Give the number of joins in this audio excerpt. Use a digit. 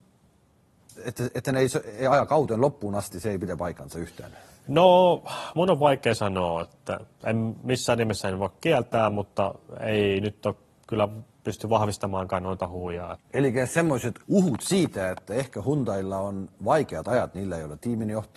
2